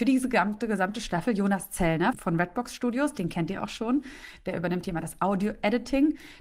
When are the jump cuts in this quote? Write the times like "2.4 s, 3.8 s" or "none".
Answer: none